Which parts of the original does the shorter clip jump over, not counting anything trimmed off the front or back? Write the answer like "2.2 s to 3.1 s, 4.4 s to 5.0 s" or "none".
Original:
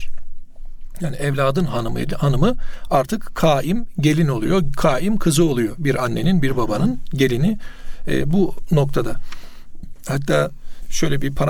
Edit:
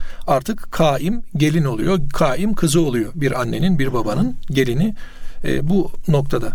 none